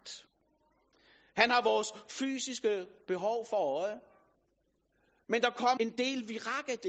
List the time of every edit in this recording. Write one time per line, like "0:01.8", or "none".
0:05.8